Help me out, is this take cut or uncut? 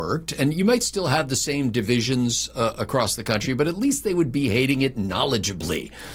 cut